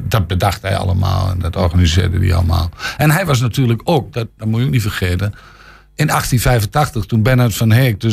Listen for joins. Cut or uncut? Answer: uncut